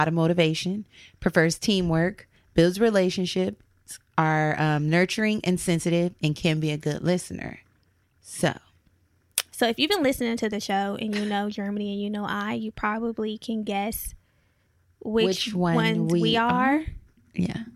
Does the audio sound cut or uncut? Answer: cut